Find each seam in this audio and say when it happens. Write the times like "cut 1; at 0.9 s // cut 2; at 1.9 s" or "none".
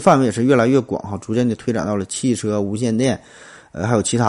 none